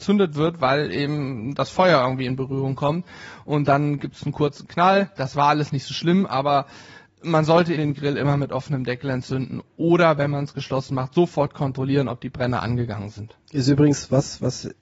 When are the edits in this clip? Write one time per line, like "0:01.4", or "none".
0:07.8

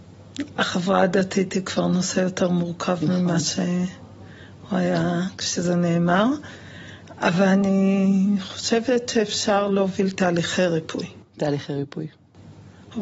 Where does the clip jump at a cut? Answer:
none

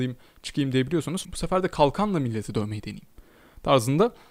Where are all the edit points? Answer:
0:01.2

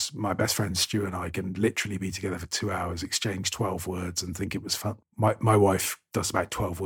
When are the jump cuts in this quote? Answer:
0:05.0

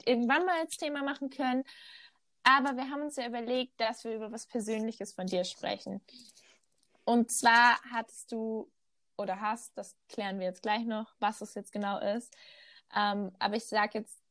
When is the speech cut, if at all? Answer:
none

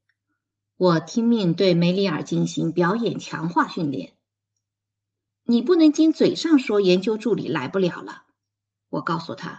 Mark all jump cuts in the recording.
0:05.9

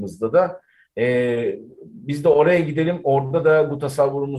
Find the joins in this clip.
none

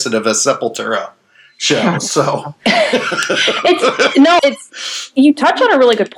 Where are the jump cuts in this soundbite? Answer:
0:04.4

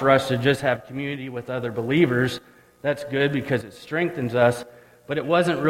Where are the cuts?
none

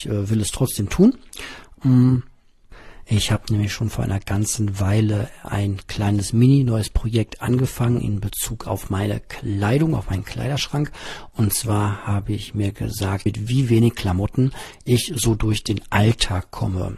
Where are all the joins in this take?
0:13.3

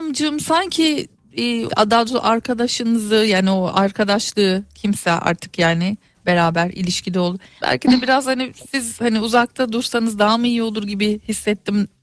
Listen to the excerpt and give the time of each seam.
0:01.7
0:07.6

